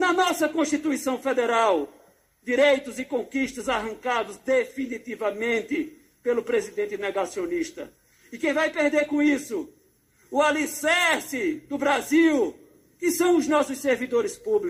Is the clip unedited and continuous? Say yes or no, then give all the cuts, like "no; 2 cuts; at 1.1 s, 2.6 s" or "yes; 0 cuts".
yes; 0 cuts